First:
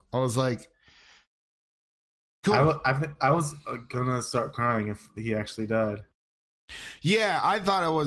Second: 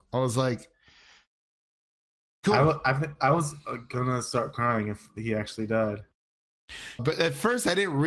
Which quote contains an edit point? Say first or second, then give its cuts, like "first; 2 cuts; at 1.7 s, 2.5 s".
second; 1 cut; at 7.0 s